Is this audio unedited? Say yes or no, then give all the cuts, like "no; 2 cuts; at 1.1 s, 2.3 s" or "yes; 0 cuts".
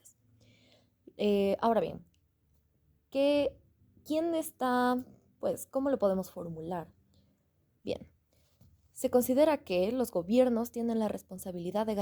no; 1 cut; at 7.8 s